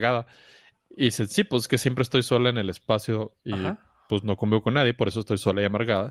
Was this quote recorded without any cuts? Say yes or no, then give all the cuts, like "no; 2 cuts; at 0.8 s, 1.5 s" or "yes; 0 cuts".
yes; 0 cuts